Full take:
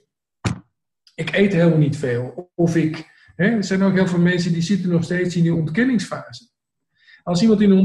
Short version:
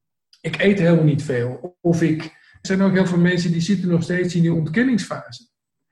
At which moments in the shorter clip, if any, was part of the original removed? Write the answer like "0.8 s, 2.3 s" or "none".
2.6 s